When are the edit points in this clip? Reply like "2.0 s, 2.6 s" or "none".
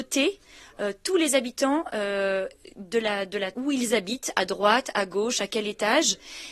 3.5 s